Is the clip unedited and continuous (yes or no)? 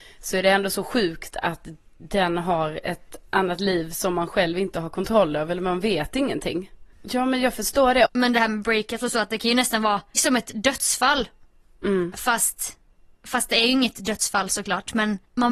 no